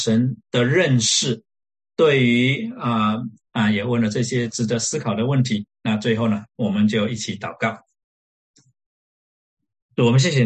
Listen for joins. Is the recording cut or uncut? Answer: cut